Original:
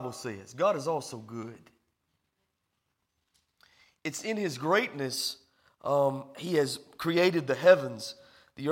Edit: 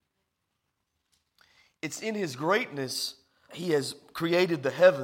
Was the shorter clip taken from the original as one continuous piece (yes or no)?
no